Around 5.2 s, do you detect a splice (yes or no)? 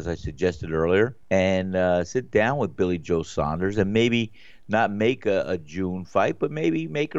no